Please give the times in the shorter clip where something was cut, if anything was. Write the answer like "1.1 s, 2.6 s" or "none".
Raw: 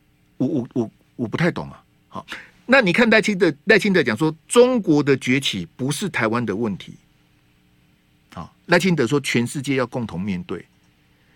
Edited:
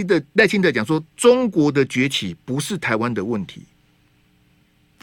none